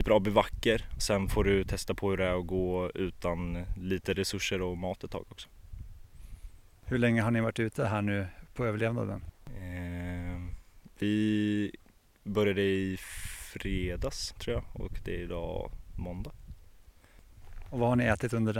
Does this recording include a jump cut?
yes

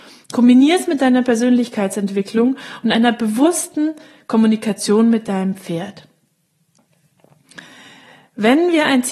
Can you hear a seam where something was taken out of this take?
no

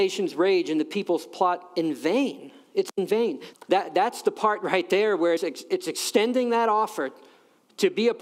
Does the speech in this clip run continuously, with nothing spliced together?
no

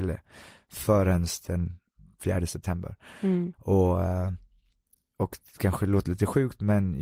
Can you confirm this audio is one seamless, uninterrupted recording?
no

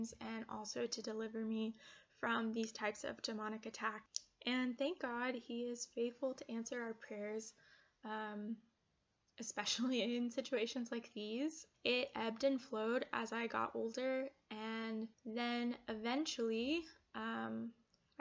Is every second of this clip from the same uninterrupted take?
no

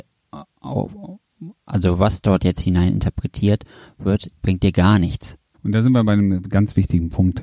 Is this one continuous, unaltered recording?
no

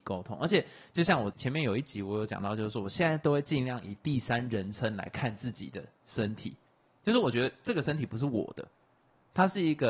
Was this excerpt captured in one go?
yes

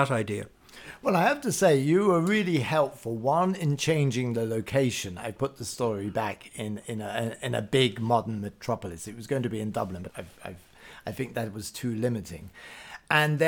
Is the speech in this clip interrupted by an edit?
yes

